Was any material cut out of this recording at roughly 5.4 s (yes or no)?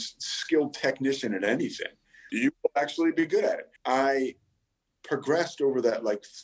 no